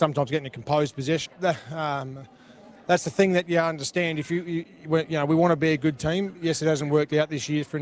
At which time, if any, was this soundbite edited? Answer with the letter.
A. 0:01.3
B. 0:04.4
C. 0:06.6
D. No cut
A